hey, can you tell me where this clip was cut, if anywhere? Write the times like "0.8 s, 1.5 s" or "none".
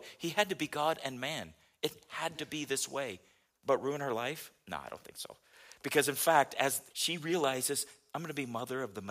6.9 s